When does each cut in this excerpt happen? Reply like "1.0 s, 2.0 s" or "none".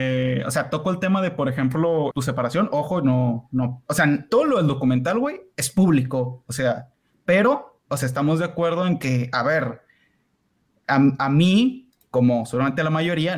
2.1 s